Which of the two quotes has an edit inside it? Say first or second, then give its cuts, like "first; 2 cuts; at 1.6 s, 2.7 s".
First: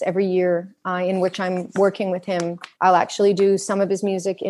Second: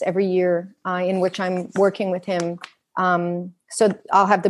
first; 1 cut; at 2.8 s